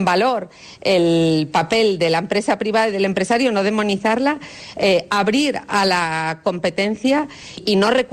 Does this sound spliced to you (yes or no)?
no